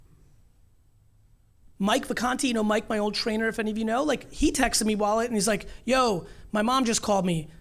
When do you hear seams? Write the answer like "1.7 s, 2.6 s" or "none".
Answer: 1.8 s